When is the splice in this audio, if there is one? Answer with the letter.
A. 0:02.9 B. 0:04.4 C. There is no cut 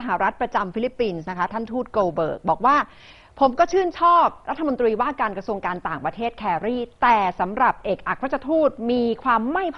B